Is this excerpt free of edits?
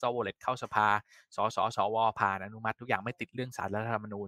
yes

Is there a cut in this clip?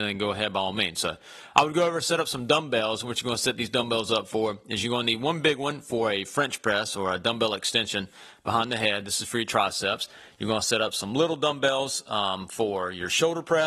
no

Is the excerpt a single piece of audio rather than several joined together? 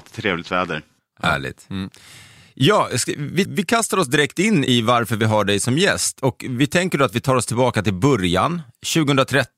no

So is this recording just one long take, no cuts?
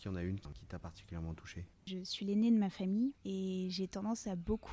no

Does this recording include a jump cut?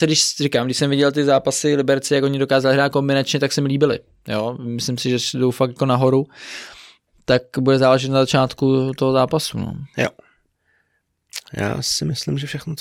no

